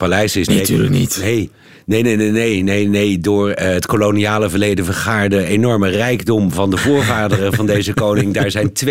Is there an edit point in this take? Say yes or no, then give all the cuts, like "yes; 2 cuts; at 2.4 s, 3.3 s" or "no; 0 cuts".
no; 0 cuts